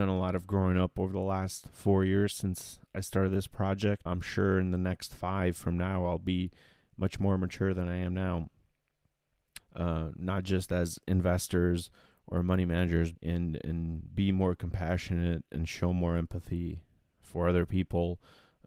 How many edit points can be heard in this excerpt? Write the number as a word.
three